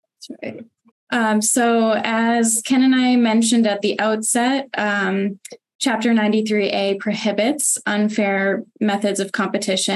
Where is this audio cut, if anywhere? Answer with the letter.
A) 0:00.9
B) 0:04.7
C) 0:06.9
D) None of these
A